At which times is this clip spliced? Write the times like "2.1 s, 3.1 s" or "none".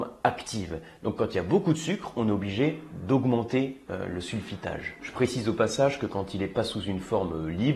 none